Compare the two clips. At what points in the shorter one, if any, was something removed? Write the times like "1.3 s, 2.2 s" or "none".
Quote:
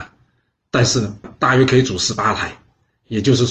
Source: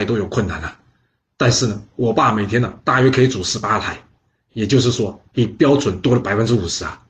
1.2 s